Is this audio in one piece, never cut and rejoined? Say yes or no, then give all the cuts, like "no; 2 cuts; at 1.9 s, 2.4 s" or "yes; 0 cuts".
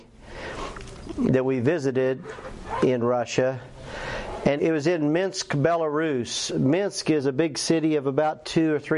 no; 2 cuts; at 4.6 s, 6.5 s